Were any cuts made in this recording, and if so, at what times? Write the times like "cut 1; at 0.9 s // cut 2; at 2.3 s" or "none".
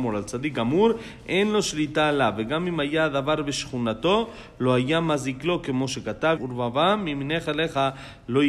cut 1; at 6.4 s